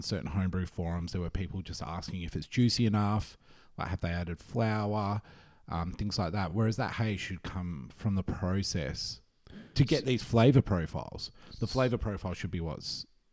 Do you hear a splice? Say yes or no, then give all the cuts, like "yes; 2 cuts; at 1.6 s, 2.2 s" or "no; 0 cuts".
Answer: no; 0 cuts